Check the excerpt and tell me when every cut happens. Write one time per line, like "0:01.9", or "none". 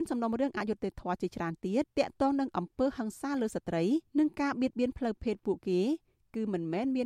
0:01.8
0:04.1